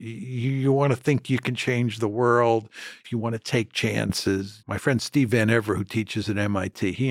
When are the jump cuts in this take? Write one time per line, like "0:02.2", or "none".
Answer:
0:03.0
0:04.6